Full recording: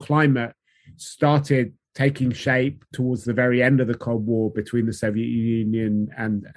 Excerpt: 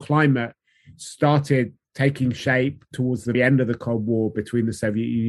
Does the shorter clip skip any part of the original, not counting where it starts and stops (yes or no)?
yes